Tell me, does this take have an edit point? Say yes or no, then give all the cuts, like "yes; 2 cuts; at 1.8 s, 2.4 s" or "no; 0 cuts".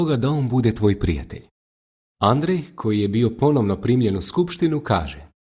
no; 0 cuts